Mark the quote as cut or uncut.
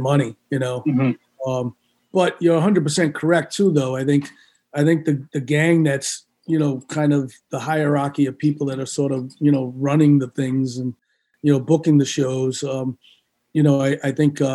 uncut